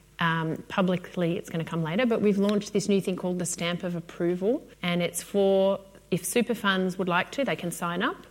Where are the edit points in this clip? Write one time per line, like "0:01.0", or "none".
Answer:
0:04.7